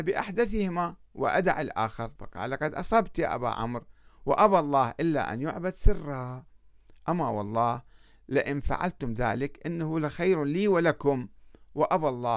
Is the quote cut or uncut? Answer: cut